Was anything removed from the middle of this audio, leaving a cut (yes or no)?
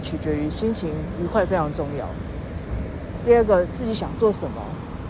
no